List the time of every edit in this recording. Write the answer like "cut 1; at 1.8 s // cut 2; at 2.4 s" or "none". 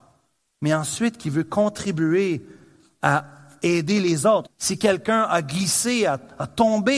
cut 1; at 4.5 s

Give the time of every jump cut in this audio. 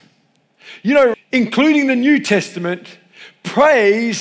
cut 1; at 1.1 s

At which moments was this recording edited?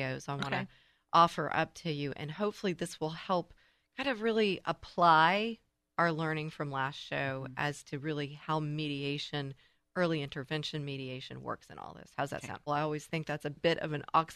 cut 1; at 12.7 s

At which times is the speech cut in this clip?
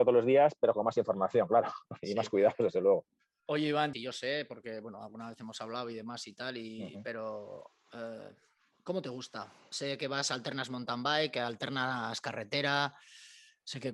cut 1; at 3.9 s

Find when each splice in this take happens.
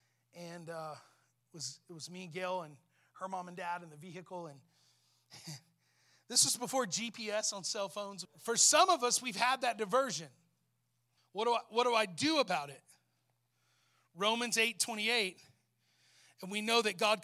cut 1; at 8.2 s // cut 2; at 11.2 s

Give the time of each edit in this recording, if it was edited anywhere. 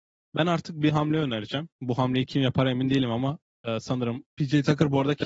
cut 1; at 4.3 s

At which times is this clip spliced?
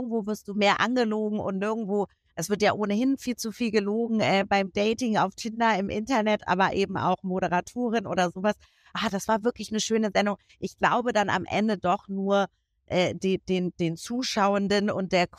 none

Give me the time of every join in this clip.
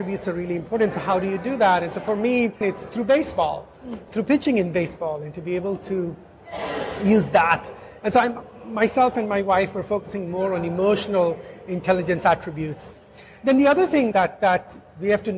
cut 1; at 2.6 s // cut 2; at 4.1 s // cut 3; at 14.1 s

